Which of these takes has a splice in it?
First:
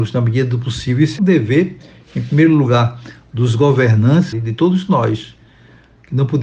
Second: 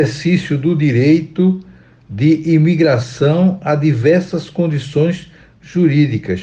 first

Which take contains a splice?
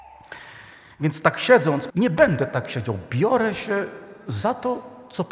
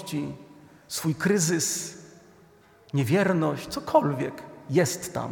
first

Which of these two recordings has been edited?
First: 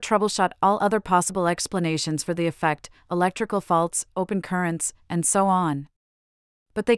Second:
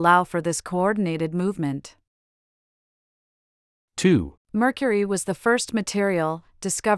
second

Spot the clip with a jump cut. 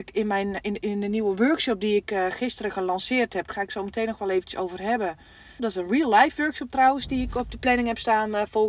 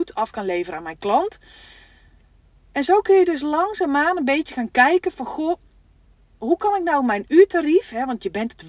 first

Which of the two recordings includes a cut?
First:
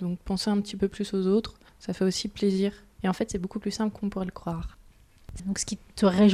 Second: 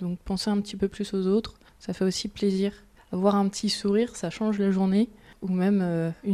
first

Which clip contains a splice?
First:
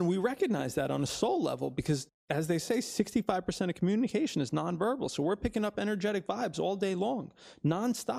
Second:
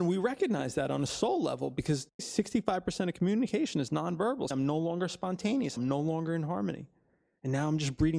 second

